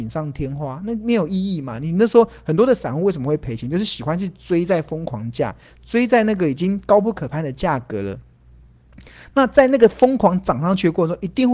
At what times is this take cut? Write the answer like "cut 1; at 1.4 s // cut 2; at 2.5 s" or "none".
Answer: none